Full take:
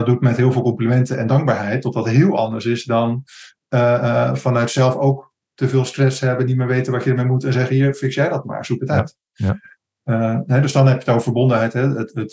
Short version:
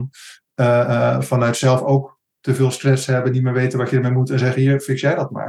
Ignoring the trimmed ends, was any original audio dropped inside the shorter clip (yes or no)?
no